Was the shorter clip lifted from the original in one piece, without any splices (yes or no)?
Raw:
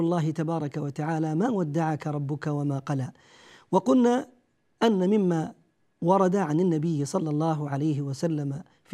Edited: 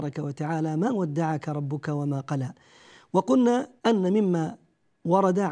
no